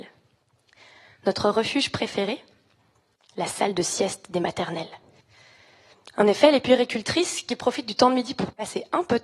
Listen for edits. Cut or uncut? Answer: uncut